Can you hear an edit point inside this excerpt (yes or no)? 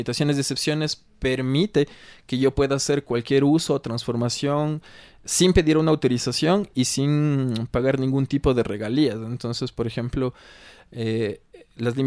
no